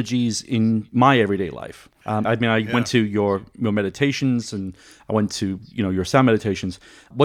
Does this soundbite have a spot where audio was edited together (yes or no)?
yes